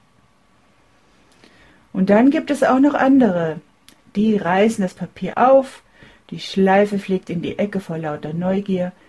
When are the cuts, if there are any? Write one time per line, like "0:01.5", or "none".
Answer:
0:05.3